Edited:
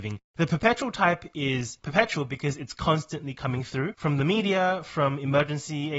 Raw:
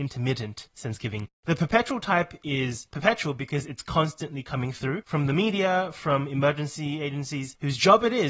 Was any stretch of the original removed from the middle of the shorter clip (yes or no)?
no